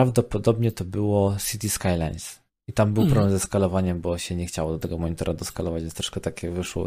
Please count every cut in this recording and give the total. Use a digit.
0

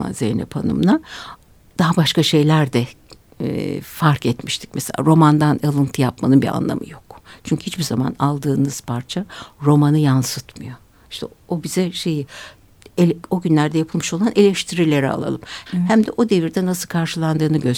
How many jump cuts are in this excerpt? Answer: 2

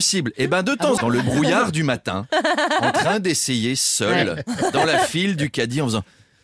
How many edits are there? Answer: 1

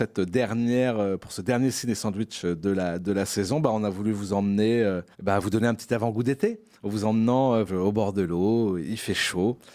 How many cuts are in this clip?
2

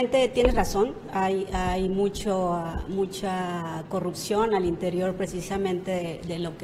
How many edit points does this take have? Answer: 0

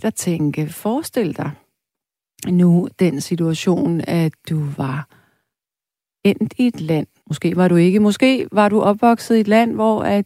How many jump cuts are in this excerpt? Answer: 1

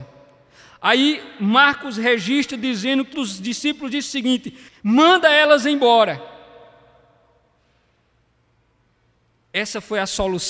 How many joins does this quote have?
2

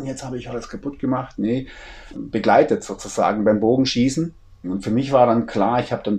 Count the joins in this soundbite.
2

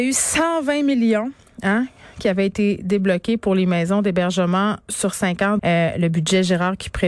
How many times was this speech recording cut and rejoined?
1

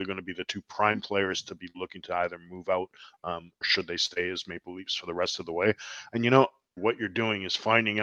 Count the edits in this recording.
2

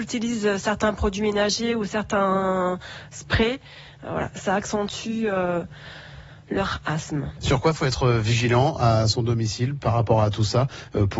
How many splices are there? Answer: 0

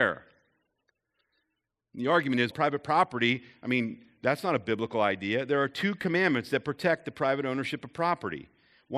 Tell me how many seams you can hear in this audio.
1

